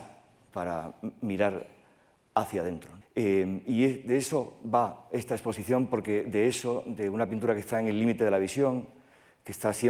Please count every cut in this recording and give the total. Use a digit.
1